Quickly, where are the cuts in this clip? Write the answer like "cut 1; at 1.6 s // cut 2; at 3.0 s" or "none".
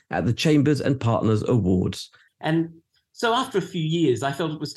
cut 1; at 2.3 s

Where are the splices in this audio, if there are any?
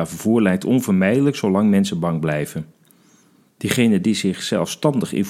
cut 1; at 3.5 s

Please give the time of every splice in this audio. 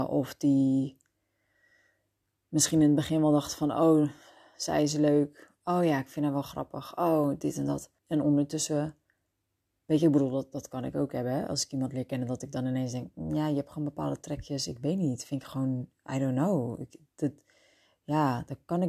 cut 1; at 8.0 s

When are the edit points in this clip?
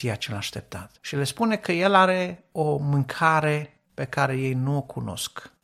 cut 1; at 1.0 s // cut 2; at 3.9 s

